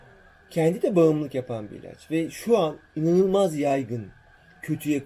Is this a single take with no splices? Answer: yes; 0 cuts

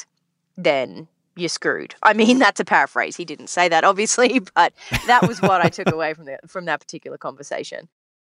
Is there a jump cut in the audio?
no; 0 cuts

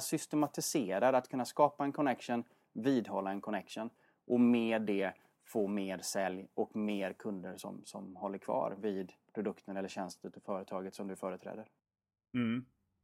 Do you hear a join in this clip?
no; 0 cuts

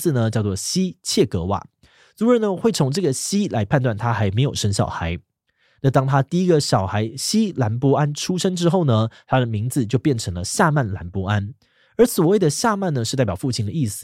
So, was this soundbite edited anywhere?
no; 0 cuts

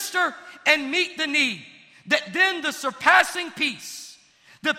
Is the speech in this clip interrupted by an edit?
no; 0 cuts

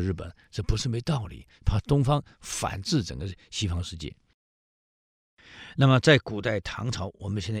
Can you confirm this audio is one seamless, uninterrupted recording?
yes; 0 cuts

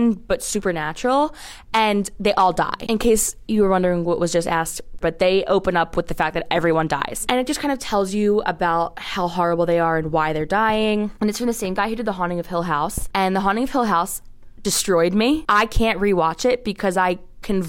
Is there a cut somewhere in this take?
yes; 1 cut; at 5.0 s

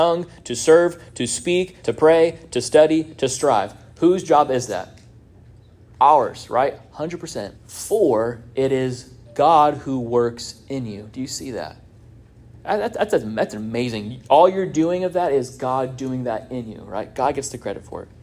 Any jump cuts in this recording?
yes; 2 cuts; at 1.8 s, 7.6 s

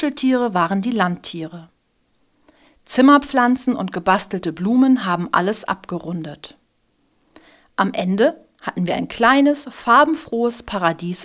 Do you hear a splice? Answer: no; 0 cuts

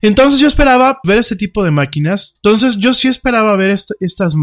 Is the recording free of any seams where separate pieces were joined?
no; 2 cuts; at 1.0 s, 2.4 s

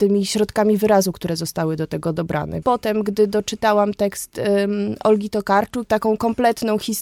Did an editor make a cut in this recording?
yes; 2 cuts; at 2.6 s, 5.8 s

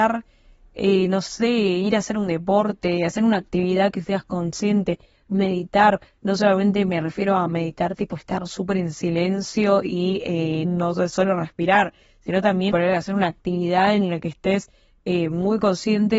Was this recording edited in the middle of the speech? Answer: yes; 2 cuts; at 10.6 s, 12.7 s

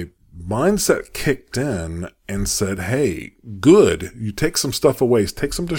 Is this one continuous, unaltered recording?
yes; 0 cuts

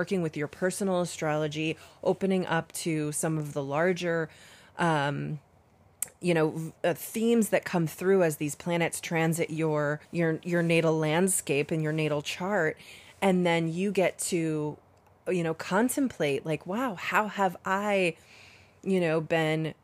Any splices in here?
yes; 1 cut; at 10.1 s

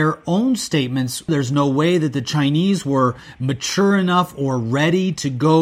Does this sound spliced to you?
yes; 1 cut; at 1.3 s

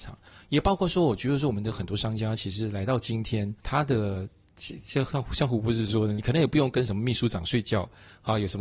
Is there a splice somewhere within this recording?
yes; 1 cut; at 3.6 s

